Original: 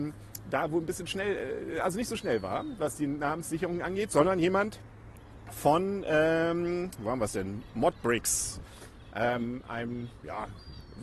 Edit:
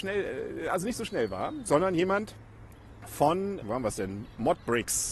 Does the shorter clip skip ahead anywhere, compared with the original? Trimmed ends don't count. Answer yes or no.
yes